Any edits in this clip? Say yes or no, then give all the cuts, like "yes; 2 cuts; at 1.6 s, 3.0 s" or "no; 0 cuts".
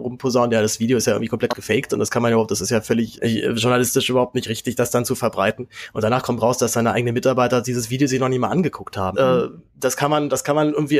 yes; 2 cuts; at 3.1 s, 9.1 s